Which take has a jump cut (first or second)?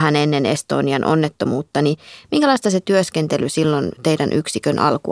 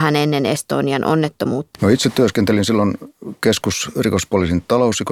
second